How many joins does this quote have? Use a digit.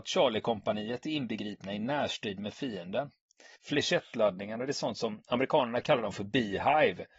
1